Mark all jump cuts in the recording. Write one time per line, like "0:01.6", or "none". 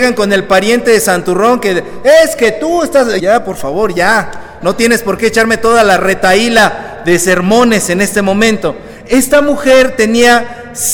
0:03.2
0:04.6

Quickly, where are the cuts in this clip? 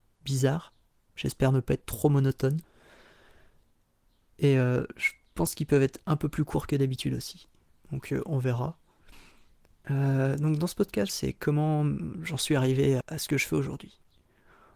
0:11.1
0:13.0

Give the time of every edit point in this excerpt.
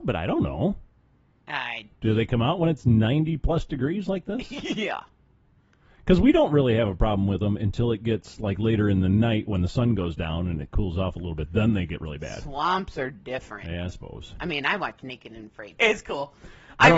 0:15.8

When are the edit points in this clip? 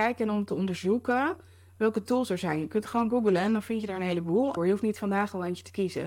0:04.6

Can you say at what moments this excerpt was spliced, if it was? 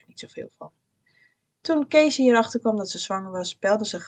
none

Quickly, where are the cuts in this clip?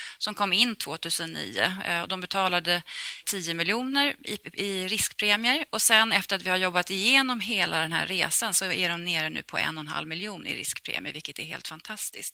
0:03.2

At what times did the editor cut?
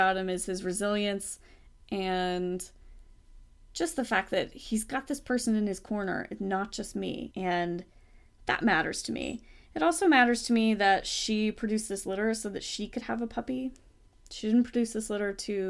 0:07.3

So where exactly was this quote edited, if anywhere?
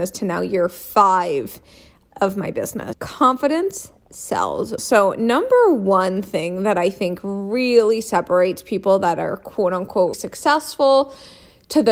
0:02.9
0:04.8
0:10.1

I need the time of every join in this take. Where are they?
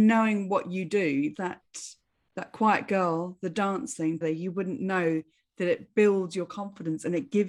0:01.3
0:04.2

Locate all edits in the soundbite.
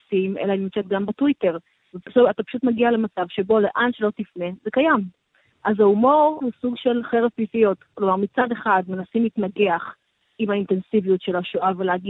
0:06.4

